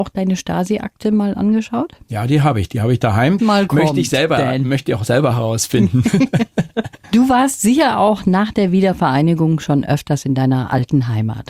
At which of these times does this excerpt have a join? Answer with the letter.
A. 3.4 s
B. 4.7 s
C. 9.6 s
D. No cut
A